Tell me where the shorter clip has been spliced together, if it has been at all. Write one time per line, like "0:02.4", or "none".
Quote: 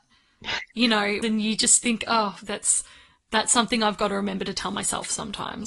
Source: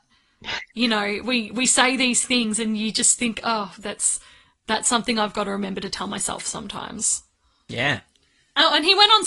0:01.2